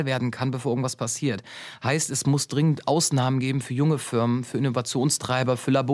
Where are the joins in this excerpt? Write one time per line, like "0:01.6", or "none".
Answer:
none